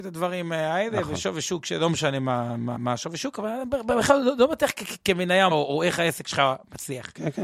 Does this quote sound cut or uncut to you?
cut